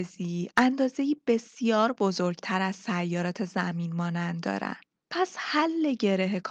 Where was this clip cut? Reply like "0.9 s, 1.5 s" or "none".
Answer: none